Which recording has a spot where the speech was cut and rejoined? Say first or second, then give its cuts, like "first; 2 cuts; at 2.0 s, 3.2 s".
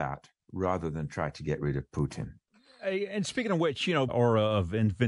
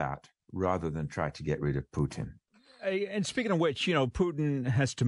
first; 1 cut; at 4.1 s